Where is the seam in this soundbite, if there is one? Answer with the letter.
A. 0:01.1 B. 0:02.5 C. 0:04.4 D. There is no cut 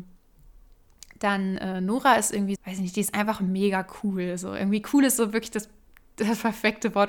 B